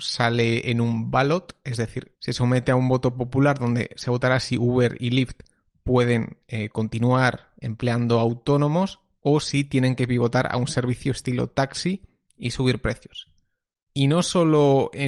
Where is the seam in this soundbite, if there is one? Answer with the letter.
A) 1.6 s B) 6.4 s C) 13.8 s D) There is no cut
C